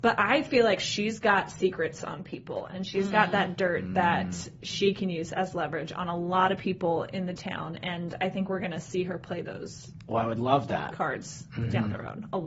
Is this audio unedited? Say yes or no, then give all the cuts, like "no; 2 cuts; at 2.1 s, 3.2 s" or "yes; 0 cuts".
yes; 0 cuts